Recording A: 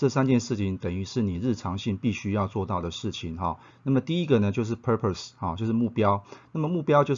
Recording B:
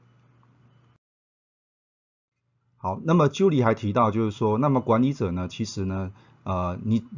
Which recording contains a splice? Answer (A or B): A